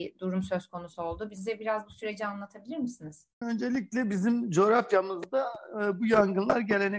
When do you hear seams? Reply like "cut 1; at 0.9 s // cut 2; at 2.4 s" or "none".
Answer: cut 1; at 3.4 s